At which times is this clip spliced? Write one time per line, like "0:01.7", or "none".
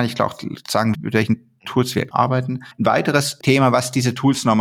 0:00.9